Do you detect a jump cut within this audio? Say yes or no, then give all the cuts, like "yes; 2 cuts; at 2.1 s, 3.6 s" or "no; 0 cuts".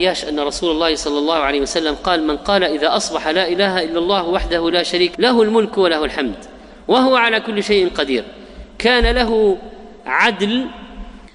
yes; 1 cut; at 5.1 s